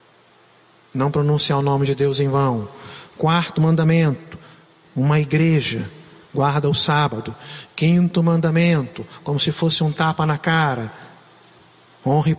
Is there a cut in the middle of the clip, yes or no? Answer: yes